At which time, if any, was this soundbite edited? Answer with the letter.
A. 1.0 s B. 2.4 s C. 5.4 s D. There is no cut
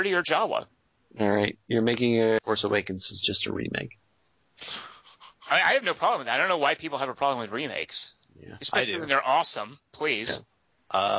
B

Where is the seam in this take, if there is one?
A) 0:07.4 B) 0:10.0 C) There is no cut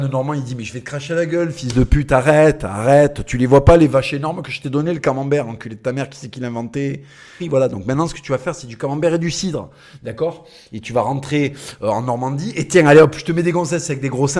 A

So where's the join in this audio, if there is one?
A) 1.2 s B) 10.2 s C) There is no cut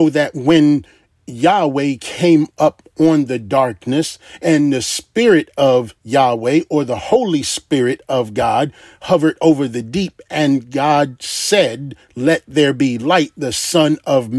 C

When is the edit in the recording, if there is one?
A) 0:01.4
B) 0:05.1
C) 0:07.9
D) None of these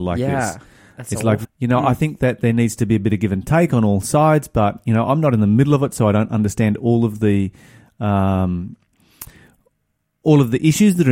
A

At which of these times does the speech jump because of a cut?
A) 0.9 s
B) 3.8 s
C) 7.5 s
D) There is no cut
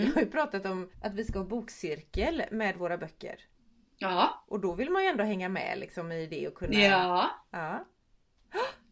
A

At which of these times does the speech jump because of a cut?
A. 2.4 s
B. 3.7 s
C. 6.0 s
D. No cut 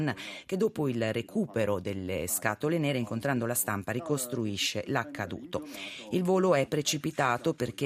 D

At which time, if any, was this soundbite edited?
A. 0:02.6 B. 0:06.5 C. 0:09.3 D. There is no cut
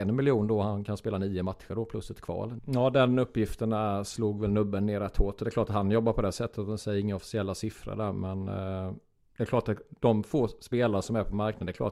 A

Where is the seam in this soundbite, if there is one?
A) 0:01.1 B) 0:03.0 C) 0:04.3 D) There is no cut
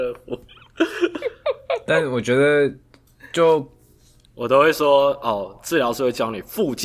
C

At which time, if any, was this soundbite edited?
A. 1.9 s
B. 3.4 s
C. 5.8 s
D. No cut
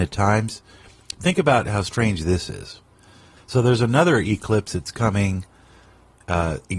B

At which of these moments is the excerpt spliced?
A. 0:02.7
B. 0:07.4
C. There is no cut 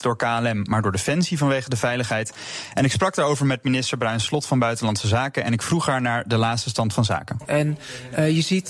B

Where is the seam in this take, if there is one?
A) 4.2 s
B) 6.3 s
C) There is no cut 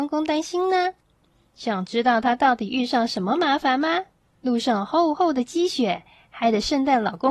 A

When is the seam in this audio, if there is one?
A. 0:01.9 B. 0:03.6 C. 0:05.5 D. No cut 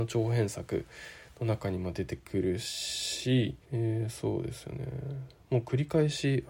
B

